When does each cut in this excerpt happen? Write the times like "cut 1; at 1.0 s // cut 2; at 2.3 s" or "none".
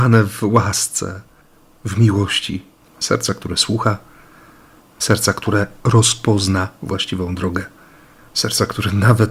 cut 1; at 2.9 s